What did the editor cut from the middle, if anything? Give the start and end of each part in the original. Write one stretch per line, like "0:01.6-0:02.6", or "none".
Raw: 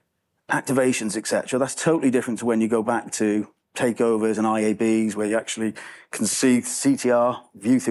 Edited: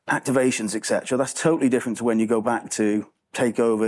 none